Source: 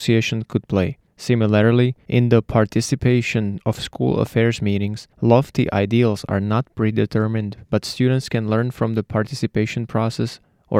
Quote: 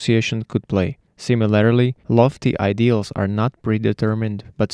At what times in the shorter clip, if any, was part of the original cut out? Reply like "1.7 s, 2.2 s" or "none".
2.0 s